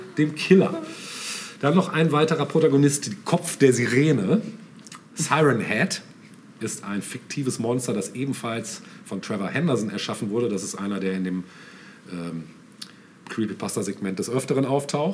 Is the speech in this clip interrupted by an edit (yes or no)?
no